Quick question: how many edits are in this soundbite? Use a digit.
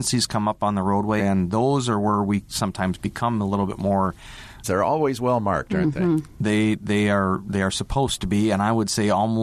2